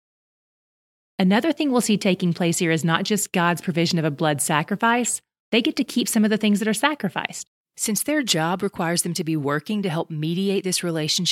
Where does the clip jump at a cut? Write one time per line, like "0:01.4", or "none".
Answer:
0:05.4